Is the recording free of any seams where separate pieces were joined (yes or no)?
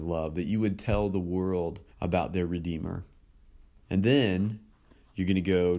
no